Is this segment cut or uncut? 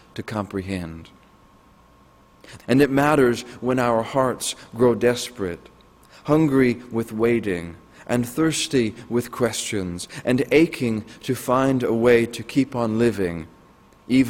cut